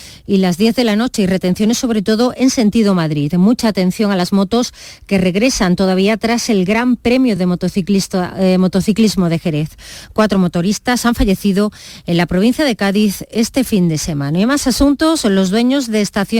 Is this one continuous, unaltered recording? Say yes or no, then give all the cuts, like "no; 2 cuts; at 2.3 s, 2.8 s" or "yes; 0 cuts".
yes; 0 cuts